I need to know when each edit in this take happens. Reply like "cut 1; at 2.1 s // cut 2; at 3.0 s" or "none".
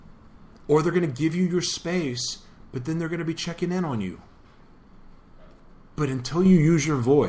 none

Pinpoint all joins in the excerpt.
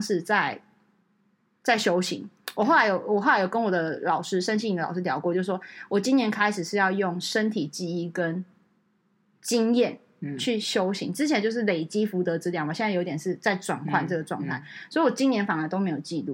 none

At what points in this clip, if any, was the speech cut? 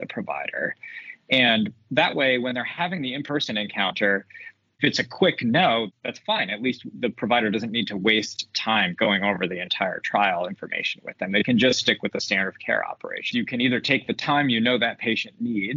cut 1; at 13.3 s

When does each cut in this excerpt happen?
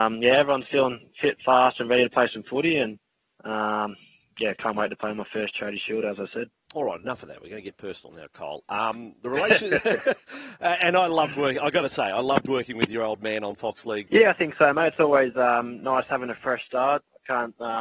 cut 1; at 14.1 s

